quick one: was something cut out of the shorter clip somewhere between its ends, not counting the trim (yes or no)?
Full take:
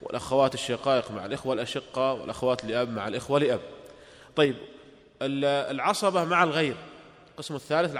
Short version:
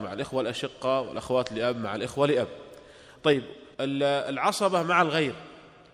yes